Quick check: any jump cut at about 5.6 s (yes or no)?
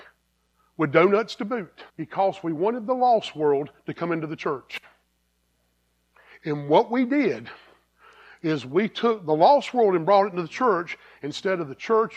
no